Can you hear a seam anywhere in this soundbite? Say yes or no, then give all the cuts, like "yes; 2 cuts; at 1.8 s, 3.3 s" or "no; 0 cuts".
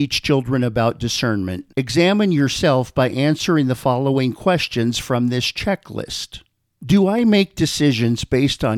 no; 0 cuts